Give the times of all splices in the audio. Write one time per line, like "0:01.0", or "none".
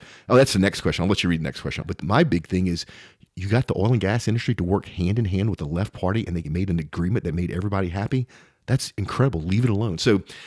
0:01.8